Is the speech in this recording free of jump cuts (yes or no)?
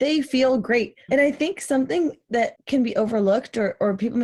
no